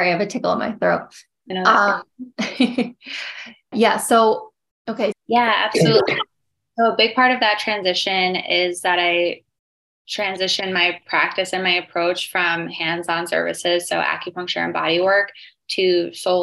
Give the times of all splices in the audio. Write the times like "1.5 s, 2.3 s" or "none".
1.5 s, 3.7 s, 5.1 s